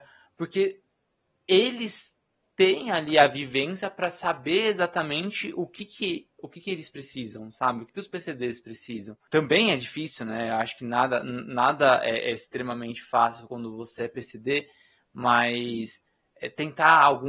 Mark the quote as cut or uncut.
uncut